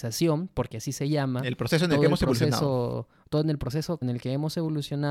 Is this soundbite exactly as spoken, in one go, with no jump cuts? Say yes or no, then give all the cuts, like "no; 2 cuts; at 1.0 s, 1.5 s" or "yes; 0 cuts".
no; 1 cut; at 4.0 s